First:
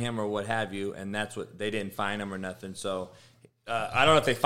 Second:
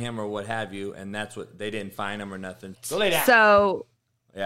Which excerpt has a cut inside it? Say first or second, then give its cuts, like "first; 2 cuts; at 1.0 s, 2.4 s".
second; 1 cut; at 2.7 s